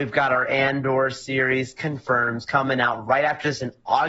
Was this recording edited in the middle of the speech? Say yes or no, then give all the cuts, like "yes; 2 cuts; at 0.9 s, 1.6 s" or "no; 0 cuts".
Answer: no; 0 cuts